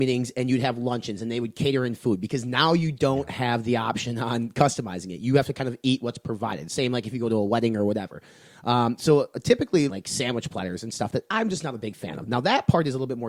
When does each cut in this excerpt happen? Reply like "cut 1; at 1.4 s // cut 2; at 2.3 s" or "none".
cut 1; at 9.9 s

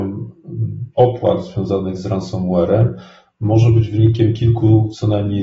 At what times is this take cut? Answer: cut 1; at 0.9 s

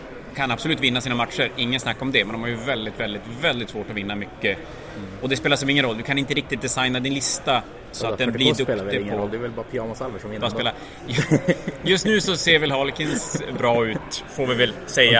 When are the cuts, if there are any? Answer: none

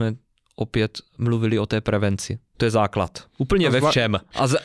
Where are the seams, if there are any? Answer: cut 1; at 1.1 s // cut 2; at 2.5 s

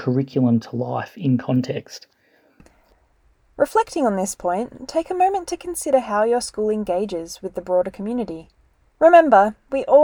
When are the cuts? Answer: cut 1; at 9.0 s

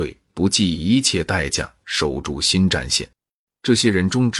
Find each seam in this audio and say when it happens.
cut 1; at 3.5 s

